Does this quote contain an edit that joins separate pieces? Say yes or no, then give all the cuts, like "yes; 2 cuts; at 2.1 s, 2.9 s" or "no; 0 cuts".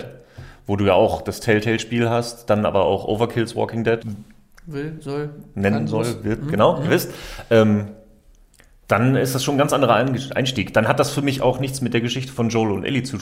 yes; 1 cut; at 4.0 s